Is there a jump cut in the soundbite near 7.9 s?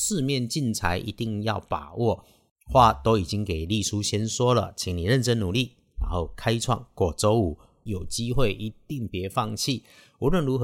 yes; 1 cut; at 7.9 s

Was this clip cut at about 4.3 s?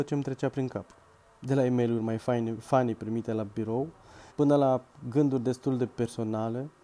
yes; 1 cut; at 4.3 s

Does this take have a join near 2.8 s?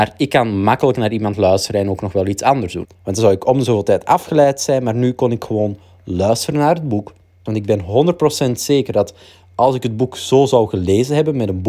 yes; 2 cuts; at 2.8 s, 7.5 s

